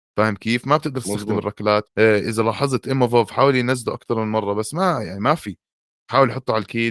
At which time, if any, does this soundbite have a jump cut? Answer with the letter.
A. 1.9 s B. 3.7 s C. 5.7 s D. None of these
A